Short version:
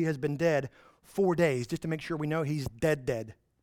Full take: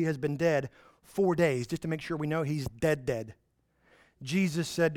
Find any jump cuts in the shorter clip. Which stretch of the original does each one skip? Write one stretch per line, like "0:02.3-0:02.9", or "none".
none

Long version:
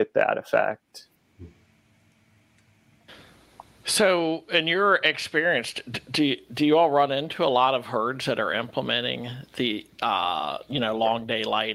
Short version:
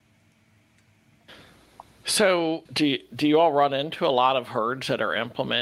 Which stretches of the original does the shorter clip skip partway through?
0:04.5-0:06.0

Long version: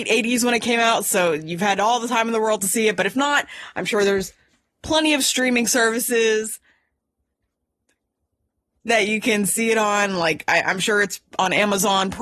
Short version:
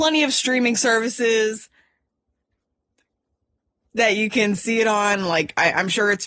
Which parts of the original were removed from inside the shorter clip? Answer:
none

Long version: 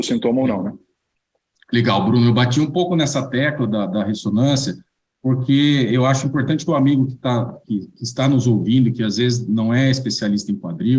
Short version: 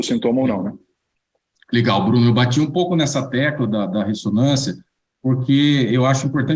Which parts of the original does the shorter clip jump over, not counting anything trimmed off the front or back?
none

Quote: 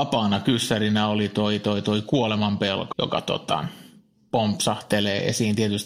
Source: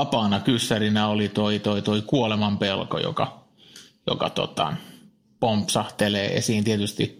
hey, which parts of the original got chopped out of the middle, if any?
0:02.9-0:04.0

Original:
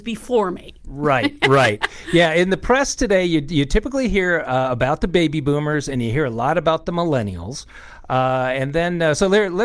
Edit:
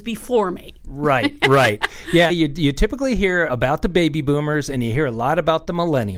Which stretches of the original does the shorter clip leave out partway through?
0:02.3-0:03.2
0:04.4-0:04.7

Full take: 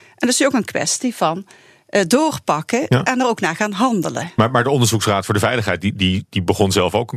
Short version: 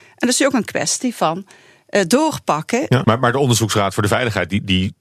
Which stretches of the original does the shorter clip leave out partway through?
0:03.0-0:04.4

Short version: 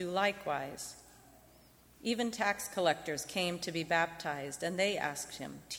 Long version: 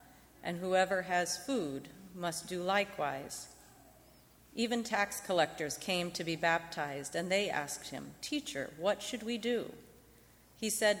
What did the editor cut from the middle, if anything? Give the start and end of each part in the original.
none

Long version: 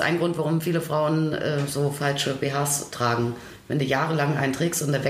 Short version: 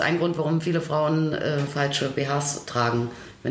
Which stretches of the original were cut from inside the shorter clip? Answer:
0:01.7-0:01.9

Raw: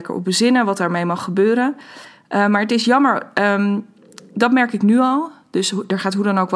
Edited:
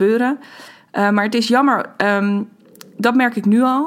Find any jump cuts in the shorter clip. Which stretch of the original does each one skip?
none

